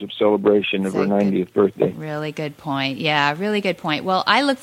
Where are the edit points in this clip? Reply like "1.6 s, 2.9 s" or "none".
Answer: none